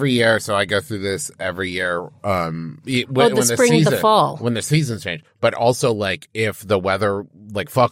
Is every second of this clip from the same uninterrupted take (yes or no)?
yes